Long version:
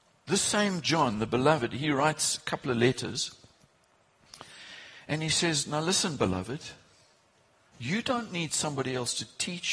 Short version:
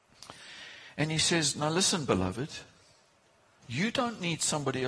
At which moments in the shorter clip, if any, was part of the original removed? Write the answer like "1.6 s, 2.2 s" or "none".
none